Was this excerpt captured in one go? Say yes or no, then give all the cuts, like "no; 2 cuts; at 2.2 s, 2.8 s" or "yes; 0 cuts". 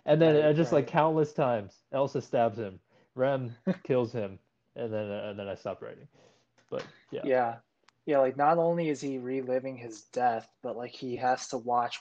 yes; 0 cuts